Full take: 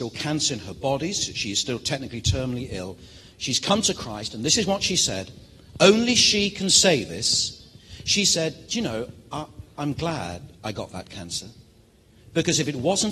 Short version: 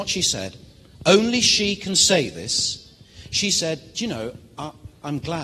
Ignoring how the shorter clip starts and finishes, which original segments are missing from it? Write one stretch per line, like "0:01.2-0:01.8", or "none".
none